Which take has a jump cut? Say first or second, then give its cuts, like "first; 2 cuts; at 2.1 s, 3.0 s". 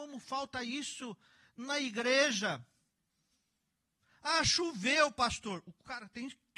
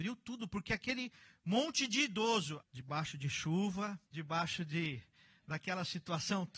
second; 2 cuts; at 2.6 s, 4.0 s